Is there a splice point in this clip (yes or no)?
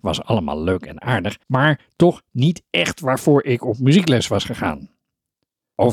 yes